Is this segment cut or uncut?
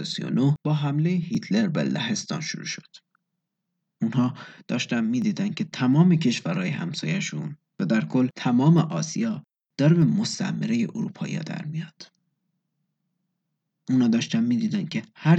cut